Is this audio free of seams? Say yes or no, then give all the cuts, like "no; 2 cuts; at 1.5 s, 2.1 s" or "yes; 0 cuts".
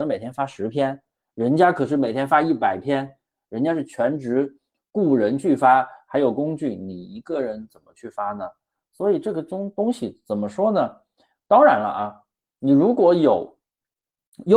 yes; 0 cuts